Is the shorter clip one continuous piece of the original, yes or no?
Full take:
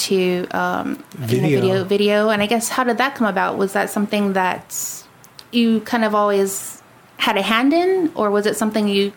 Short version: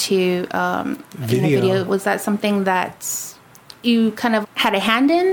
no